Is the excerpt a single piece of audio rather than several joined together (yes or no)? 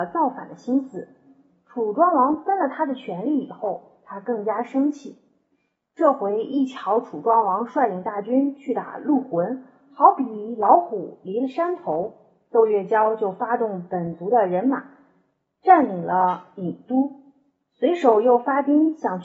yes